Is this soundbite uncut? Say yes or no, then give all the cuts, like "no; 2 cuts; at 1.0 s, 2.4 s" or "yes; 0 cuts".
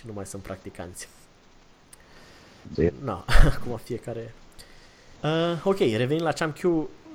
no; 2 cuts; at 2.7 s, 5.2 s